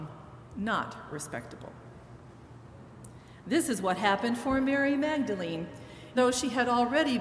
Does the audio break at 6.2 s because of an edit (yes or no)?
yes